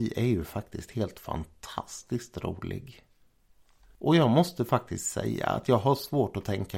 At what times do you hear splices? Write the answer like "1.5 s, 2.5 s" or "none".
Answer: none